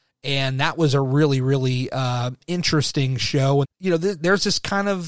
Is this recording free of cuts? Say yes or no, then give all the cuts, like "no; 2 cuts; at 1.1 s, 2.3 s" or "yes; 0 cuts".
no; 1 cut; at 3.6 s